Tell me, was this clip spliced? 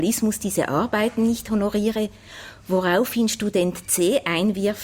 no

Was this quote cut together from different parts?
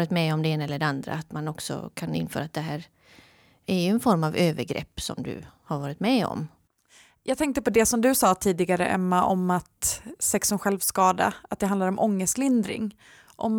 no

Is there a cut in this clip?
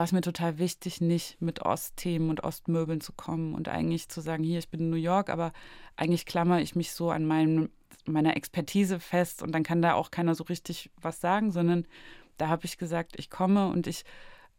no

